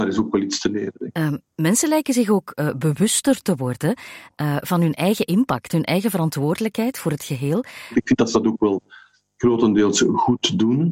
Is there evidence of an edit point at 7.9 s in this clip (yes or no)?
yes